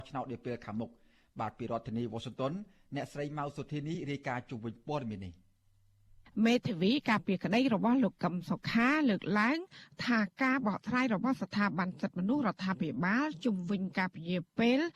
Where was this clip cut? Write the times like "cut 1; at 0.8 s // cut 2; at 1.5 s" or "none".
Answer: none